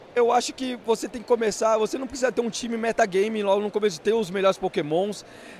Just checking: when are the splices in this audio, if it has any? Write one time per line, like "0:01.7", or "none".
none